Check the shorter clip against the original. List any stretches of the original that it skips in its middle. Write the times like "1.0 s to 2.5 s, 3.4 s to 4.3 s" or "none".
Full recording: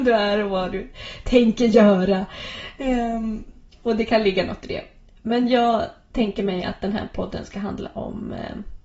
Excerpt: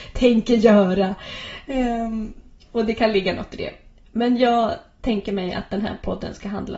none

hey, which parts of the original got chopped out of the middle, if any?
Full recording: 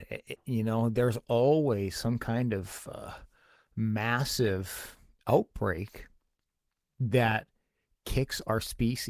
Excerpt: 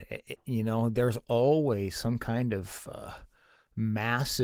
none

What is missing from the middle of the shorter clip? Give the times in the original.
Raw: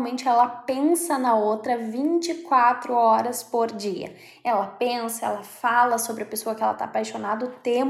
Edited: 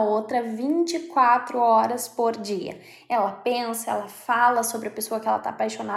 none

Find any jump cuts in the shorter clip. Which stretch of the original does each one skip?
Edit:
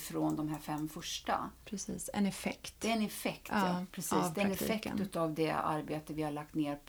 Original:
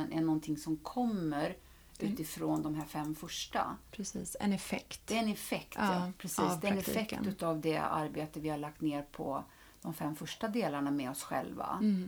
none

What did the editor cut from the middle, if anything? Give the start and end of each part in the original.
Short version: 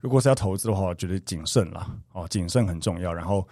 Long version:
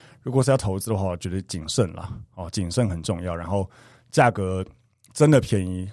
none

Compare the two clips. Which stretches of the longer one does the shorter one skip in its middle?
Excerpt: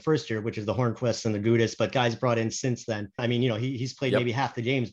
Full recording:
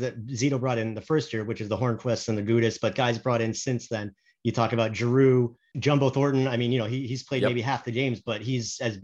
4.2 s to 6.5 s

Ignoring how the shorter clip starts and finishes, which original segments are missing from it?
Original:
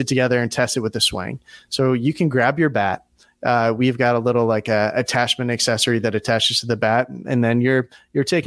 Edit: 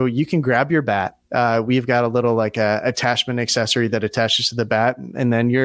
3.1 s to 3.3 s

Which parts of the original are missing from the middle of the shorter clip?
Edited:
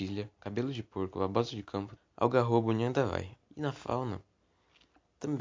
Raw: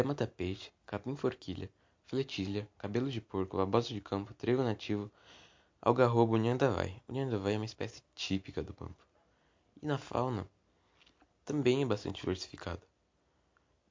4.3 s to 5.6 s, 7.1 s to 9.7 s

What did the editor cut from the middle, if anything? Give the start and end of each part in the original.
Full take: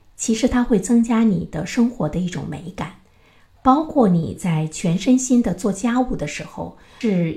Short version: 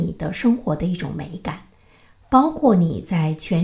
none

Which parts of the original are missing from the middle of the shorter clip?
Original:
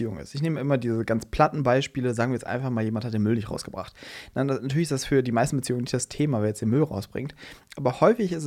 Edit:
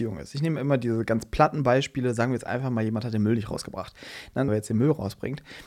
4.5 s to 6.4 s

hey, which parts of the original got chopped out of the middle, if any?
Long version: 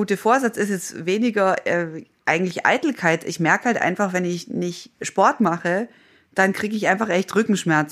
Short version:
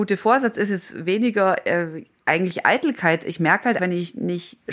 3.8 s to 4.1 s

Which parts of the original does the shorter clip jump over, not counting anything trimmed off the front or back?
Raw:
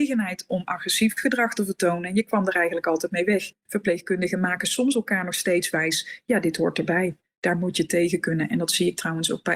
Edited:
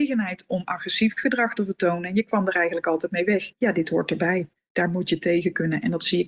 3.6 s to 6.2 s

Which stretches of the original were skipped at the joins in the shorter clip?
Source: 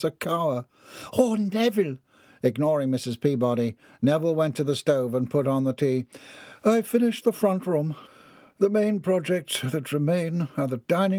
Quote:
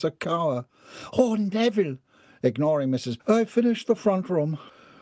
3.2 s to 6.6 s

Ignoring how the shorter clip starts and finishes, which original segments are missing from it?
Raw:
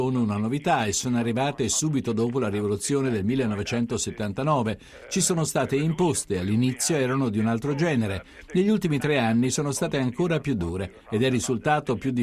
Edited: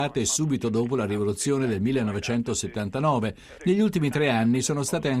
5.0 s to 8.5 s

